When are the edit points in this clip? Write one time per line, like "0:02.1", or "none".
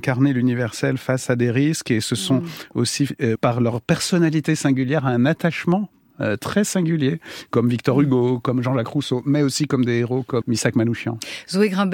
0:03.3
0:10.4